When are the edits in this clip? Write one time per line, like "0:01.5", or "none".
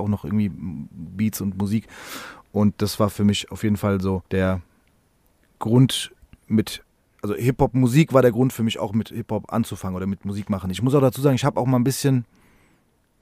0:04.3